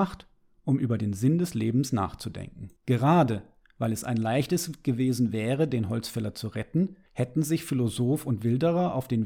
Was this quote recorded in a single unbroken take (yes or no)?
no